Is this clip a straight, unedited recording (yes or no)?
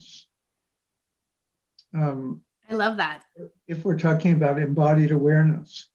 yes